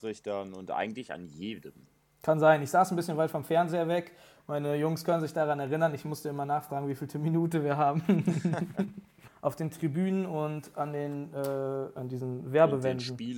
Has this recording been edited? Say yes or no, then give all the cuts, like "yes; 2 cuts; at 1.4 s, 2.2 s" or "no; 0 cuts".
yes; 2 cuts; at 9.3 s, 12.0 s